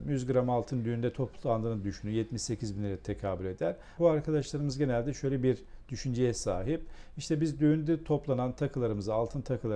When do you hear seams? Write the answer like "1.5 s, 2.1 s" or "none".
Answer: 4.0 s